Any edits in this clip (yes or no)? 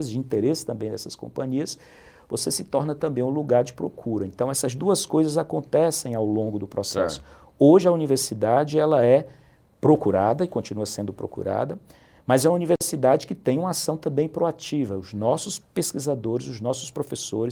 no